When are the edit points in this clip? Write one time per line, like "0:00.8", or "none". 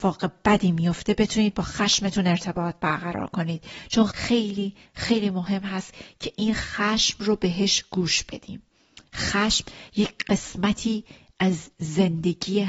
0:04.1